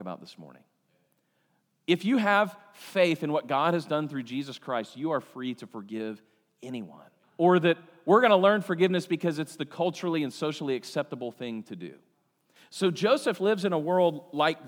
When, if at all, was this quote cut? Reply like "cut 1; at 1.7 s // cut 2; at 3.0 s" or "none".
cut 1; at 7.2 s // cut 2; at 12.6 s